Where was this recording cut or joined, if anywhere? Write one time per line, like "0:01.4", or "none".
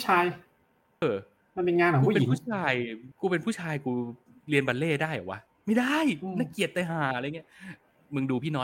0:01.0
0:03.1